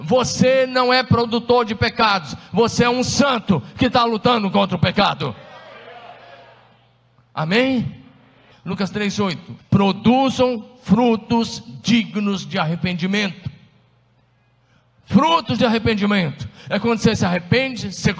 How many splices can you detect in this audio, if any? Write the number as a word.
two